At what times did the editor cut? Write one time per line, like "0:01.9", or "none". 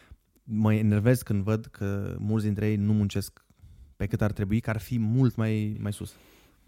0:05.7